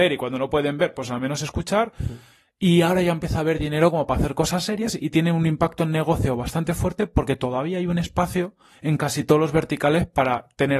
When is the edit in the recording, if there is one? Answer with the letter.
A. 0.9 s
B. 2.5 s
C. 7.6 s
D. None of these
D